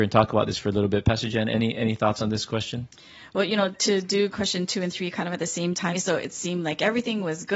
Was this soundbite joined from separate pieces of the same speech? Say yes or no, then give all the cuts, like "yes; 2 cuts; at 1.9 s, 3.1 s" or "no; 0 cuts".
yes; 1 cut; at 5.9 s